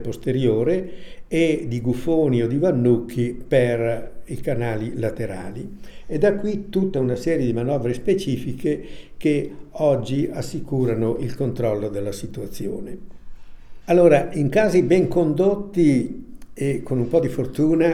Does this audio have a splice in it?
yes; 1 cut; at 13.8 s

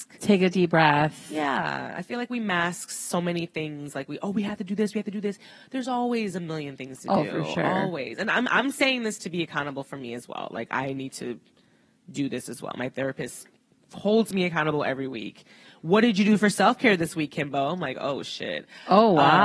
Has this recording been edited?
no; 0 cuts

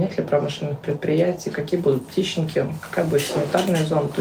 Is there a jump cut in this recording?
no; 0 cuts

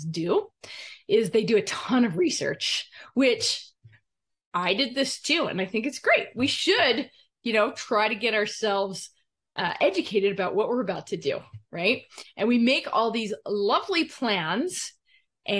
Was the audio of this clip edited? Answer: no; 0 cuts

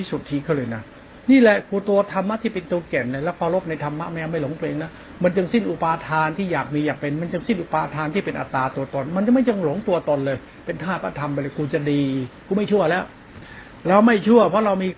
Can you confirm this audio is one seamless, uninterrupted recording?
yes; 0 cuts

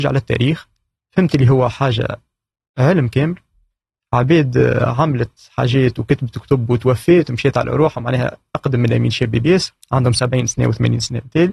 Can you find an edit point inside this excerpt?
yes; 1 cut; at 9.8 s

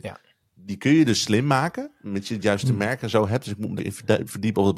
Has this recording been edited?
yes; 1 cut; at 3.8 s

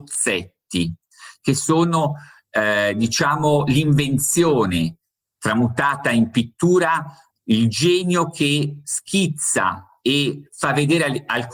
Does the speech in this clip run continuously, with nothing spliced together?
yes; 0 cuts

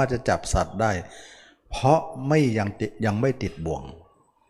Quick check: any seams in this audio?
no; 0 cuts

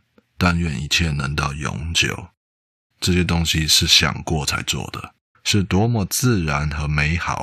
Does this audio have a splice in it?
yes; 2 cuts; at 2.9 s, 5.3 s

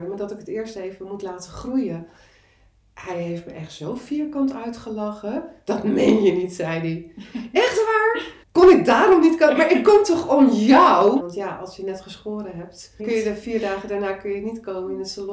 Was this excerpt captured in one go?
no; 3 cuts; at 8.4 s, 11.2 s, 13.0 s

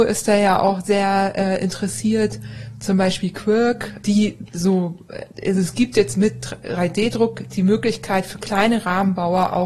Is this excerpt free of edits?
no; 1 cut; at 4.0 s

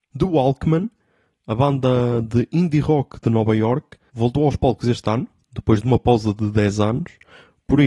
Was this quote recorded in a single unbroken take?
yes; 0 cuts

